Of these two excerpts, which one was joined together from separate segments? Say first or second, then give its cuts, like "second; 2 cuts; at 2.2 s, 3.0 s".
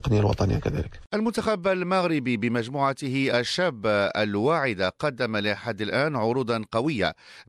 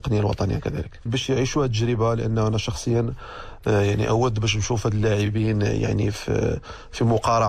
second; 1 cut; at 1.1 s